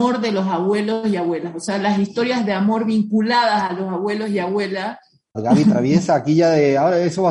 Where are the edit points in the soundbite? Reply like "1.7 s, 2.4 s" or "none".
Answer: 5.3 s